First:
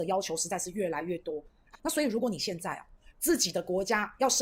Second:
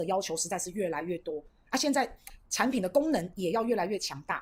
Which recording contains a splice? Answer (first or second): first